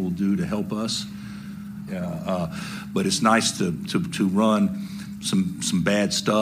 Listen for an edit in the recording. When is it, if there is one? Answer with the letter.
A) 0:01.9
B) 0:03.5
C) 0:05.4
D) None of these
A